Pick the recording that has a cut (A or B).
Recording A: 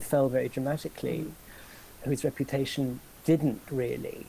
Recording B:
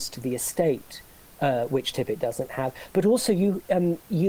A